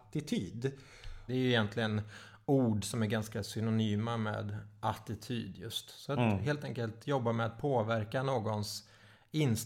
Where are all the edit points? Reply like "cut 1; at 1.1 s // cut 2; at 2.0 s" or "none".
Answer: cut 1; at 1.3 s